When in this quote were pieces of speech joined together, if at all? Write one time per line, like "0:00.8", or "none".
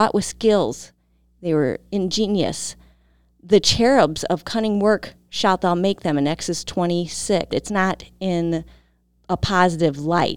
0:07.5